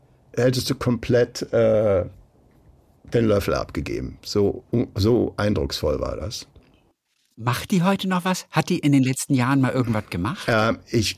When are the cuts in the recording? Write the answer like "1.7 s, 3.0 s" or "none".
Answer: none

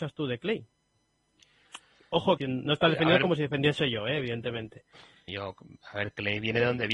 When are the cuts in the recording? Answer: 2.4 s, 5.3 s

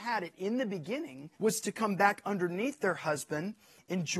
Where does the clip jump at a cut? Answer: 1.3 s

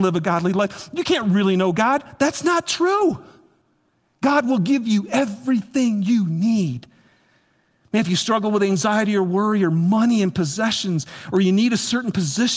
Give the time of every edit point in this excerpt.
none

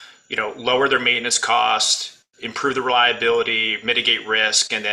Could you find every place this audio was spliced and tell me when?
none

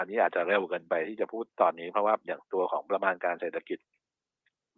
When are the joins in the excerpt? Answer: none

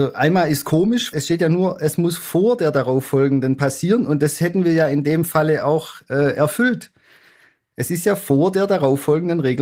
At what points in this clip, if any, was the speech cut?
1.1 s

